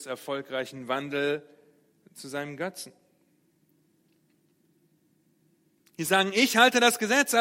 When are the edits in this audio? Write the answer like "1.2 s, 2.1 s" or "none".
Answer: 5.8 s